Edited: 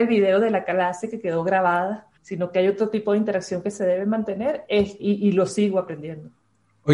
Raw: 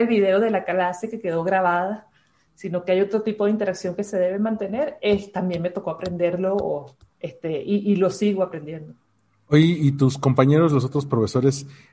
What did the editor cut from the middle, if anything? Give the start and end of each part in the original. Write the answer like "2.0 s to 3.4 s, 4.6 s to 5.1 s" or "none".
2.2 s to 2.5 s, 5.3 s to 7.6 s